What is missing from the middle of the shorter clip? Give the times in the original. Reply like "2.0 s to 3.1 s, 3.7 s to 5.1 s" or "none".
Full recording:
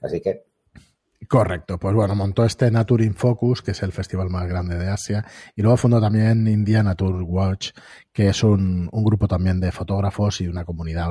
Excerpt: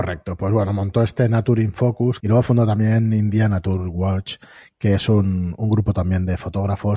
3.6 s to 5.5 s